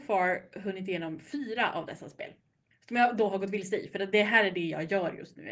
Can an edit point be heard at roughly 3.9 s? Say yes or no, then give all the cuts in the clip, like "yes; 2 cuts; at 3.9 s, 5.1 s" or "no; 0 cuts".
no; 0 cuts